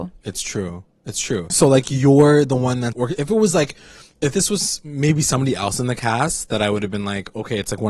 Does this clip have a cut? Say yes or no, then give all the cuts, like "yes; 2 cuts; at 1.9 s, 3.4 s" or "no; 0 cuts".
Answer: yes; 2 cuts; at 1.5 s, 2.9 s